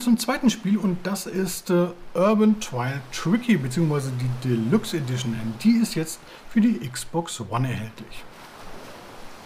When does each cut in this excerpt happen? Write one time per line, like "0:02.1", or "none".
none